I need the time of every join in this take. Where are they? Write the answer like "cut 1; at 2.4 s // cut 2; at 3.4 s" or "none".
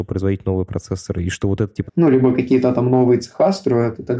cut 1; at 1.9 s